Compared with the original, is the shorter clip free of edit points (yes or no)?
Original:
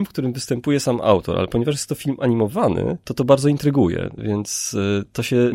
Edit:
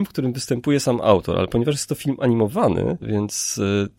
no